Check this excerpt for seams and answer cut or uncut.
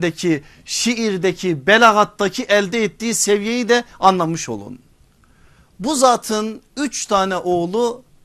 uncut